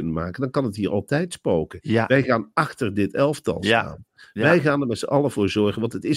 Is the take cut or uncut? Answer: uncut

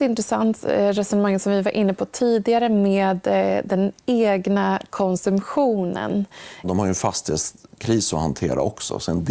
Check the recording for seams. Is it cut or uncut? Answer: cut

